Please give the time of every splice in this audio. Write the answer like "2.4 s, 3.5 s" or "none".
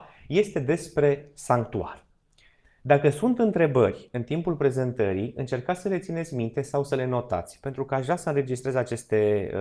2.6 s

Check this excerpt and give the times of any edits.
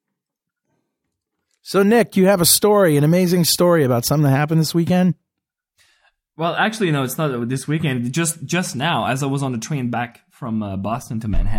none

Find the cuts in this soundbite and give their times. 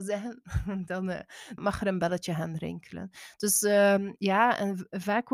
1.6 s

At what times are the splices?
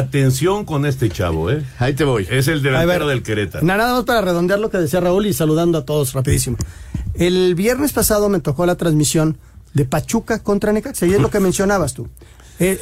none

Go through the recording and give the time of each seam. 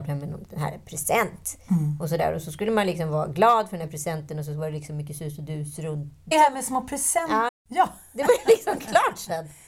6.3 s, 7.5 s

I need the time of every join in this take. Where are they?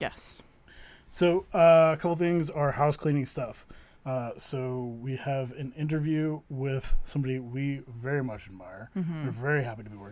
3.9 s

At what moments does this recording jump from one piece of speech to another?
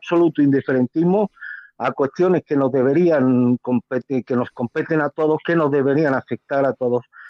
none

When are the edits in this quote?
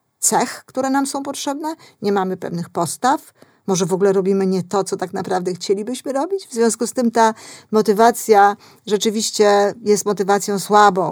none

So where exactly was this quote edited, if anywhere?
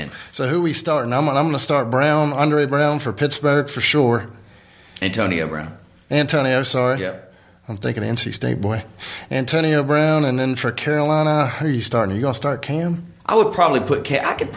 13.2 s

